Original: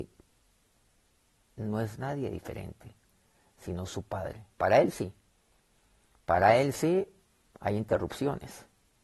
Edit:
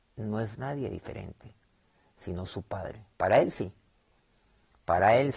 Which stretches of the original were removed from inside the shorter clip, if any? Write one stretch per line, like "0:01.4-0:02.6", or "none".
none